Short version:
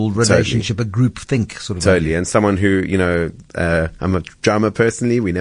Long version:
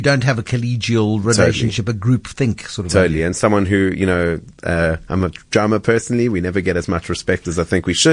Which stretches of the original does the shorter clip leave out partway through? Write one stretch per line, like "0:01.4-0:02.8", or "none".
none